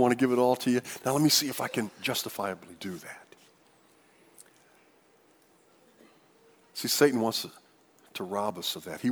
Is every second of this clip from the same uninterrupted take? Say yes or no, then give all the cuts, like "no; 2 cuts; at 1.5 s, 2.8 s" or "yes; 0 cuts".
yes; 0 cuts